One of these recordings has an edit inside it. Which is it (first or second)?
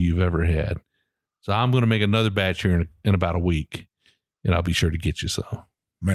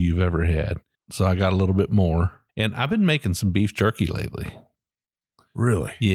second